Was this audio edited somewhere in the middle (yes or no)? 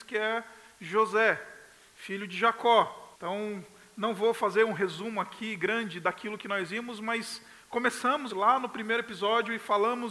yes